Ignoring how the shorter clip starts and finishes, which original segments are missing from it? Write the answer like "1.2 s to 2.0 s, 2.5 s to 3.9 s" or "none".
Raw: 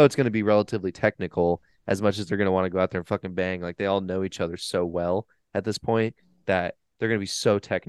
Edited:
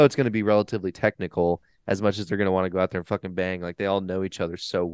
none